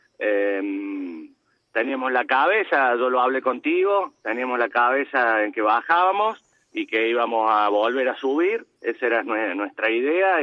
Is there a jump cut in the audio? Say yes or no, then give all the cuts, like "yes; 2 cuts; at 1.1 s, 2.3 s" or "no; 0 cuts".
no; 0 cuts